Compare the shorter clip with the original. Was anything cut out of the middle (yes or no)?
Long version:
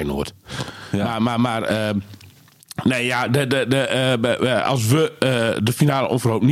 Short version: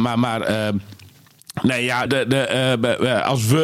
yes